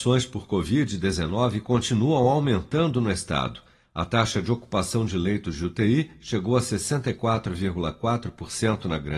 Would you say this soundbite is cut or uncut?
uncut